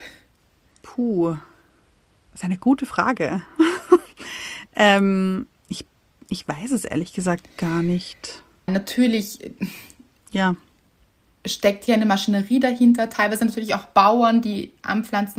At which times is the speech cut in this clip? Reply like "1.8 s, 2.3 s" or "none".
8.7 s